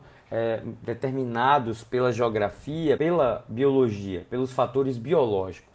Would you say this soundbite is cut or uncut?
cut